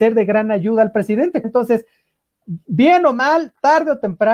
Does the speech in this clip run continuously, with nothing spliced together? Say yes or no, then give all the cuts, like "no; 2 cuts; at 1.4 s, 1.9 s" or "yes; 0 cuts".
no; 1 cut; at 1.4 s